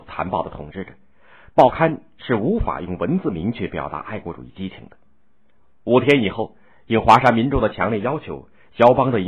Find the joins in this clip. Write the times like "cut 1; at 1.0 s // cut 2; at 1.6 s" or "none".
none